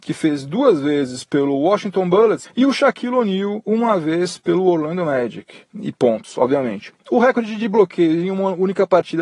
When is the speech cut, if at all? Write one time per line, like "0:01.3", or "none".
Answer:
0:02.4
0:05.7
0:07.0